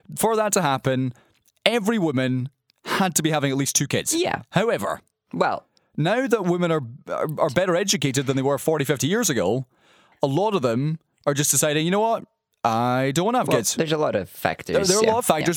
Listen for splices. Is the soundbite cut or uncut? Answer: uncut